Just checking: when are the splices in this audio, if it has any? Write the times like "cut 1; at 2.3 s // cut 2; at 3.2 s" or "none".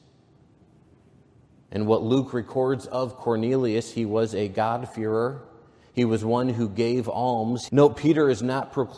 cut 1; at 7.7 s